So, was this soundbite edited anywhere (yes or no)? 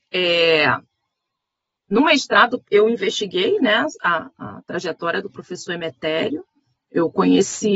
no